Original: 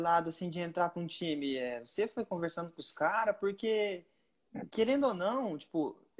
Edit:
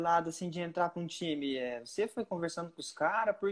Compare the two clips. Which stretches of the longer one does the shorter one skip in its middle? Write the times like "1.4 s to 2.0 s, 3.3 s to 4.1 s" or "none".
none